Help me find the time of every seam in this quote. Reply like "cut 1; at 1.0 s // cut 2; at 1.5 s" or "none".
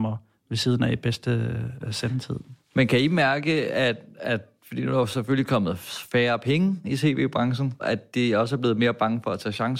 cut 1; at 7.8 s